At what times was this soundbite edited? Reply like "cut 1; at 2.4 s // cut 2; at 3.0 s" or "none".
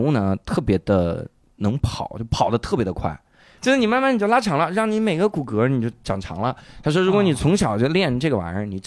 cut 1; at 3.6 s